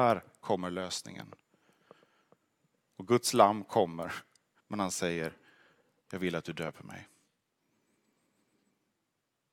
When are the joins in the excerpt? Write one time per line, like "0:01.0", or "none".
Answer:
0:02.7
0:04.6